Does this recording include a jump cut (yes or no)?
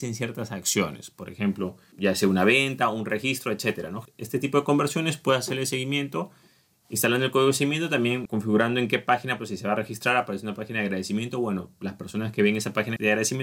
yes